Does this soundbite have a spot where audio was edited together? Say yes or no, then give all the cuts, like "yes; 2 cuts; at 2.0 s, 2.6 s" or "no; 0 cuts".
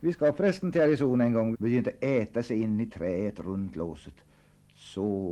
yes; 1 cut; at 1.5 s